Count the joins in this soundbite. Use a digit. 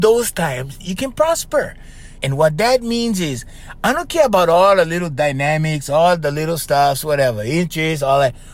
1